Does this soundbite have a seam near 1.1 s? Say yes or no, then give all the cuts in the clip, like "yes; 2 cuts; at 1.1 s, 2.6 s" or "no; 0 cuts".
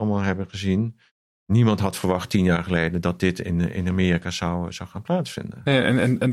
no; 0 cuts